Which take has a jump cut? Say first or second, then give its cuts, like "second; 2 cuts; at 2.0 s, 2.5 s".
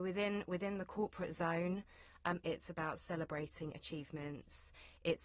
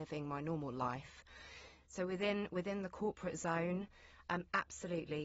first; 1 cut; at 2.4 s